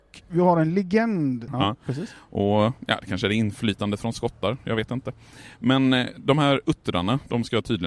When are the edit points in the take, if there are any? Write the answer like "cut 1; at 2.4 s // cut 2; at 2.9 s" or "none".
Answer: cut 1; at 1.5 s